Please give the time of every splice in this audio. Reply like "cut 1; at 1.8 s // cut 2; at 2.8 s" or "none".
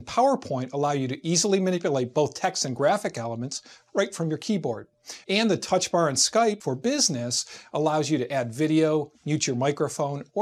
cut 1; at 5.2 s

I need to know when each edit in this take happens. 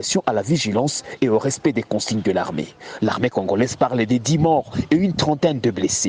cut 1; at 3.0 s

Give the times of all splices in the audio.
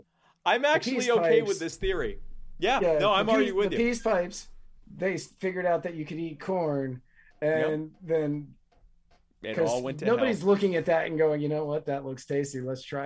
none

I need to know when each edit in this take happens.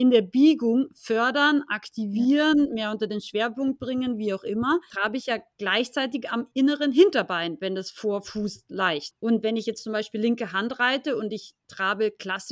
cut 1; at 4.9 s // cut 2; at 9.1 s

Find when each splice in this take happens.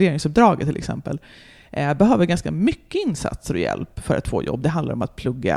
none

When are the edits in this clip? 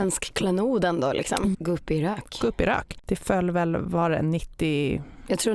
cut 1; at 1.5 s

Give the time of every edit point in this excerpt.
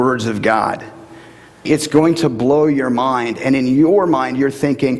cut 1; at 1.7 s

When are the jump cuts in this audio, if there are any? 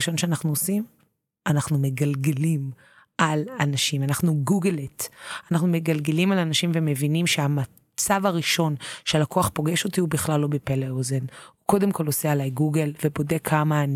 none

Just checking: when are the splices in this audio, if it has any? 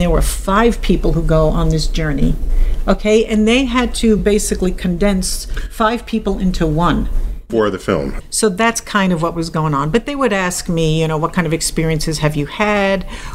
none

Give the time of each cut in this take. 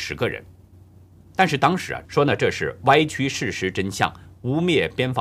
cut 1; at 2.0 s

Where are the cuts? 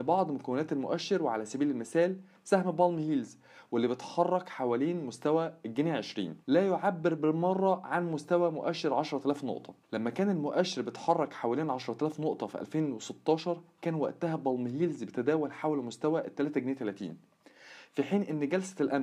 cut 1; at 6.4 s // cut 2; at 9.8 s

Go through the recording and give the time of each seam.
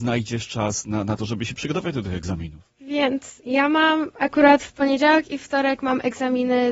none

